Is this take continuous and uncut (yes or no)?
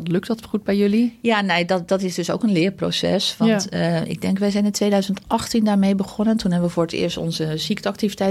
yes